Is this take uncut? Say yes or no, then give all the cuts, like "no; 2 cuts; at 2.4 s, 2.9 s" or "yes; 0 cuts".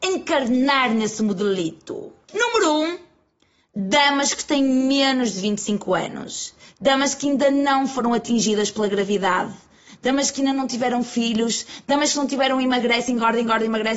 yes; 0 cuts